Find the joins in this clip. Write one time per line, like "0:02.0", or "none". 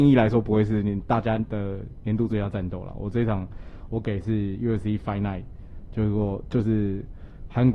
none